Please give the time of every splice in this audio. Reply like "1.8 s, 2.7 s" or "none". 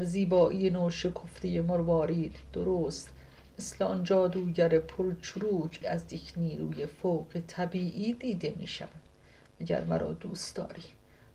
5.8 s